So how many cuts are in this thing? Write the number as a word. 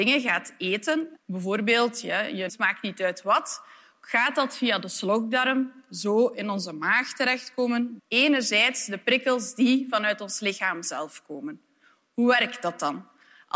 three